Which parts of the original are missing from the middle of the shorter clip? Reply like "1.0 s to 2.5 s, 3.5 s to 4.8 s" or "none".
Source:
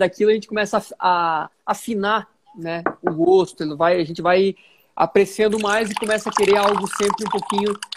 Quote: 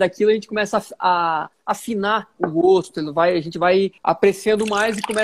2.4 s to 3.0 s, 4.6 s to 4.9 s